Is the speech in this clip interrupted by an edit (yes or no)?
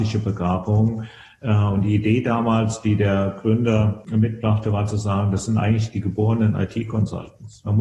no